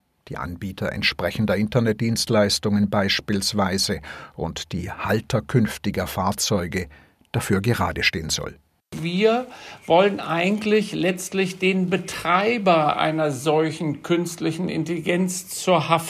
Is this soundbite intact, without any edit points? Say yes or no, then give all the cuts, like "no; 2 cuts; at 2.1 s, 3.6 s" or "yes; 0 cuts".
yes; 0 cuts